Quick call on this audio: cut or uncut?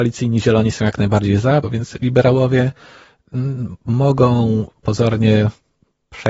cut